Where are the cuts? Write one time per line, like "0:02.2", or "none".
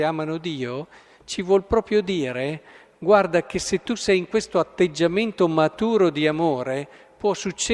none